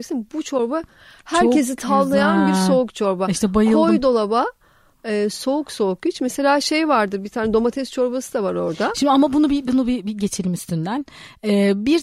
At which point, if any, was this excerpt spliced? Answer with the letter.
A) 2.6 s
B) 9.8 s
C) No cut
C